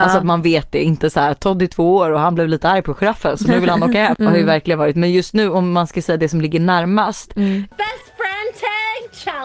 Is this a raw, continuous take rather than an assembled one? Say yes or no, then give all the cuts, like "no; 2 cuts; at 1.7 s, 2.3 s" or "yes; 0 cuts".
no; 2 cuts; at 4.1 s, 7.7 s